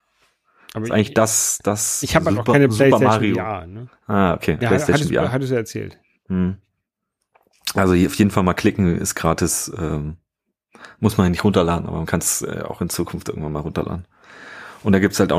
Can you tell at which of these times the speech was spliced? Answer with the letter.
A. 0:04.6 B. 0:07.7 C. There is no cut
A